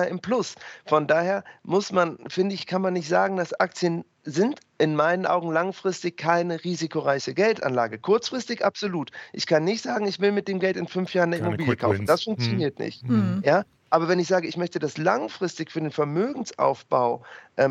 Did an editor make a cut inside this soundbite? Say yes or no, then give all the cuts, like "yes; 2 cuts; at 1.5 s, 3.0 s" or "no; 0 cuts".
no; 0 cuts